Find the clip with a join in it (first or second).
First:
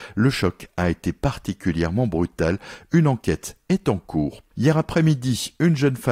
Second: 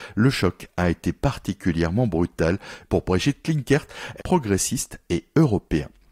second